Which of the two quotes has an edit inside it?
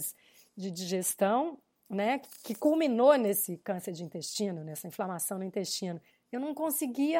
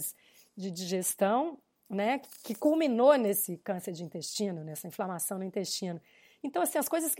first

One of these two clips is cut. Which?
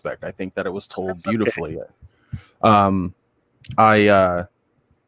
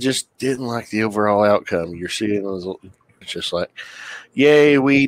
second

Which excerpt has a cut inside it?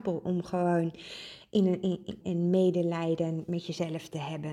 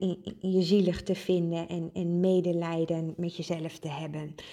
first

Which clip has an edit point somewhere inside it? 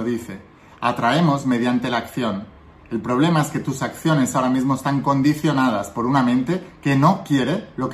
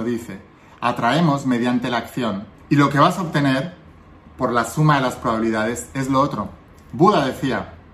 second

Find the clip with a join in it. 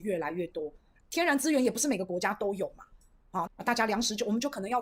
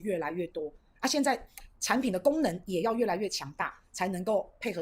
first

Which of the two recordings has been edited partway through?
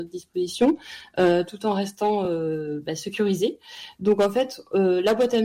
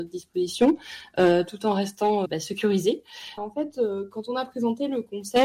second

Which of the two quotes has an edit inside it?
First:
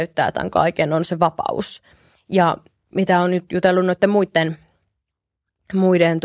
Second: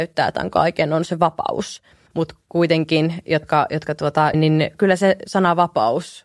second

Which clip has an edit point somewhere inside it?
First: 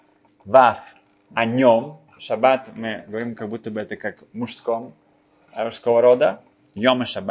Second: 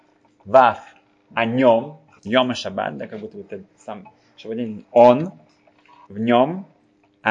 second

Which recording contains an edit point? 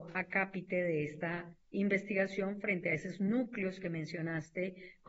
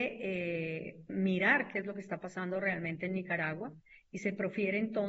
second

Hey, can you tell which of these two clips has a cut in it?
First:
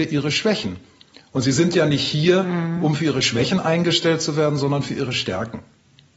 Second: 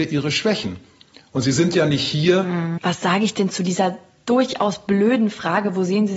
second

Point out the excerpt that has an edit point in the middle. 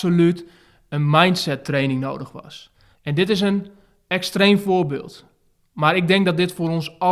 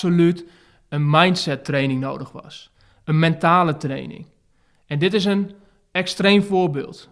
first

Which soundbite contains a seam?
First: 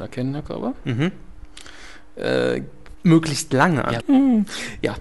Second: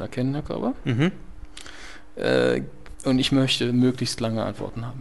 first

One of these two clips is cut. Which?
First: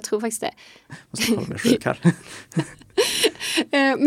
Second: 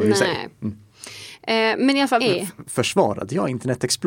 second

